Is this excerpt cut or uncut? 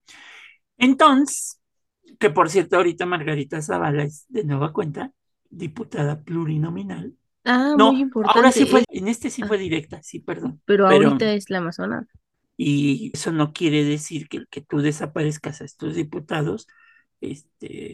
cut